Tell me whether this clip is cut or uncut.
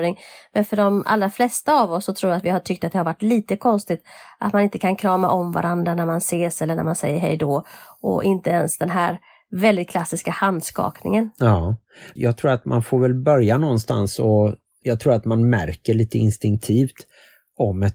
cut